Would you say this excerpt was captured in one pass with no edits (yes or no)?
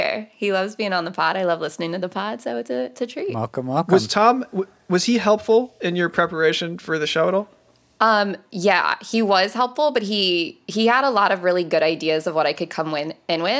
yes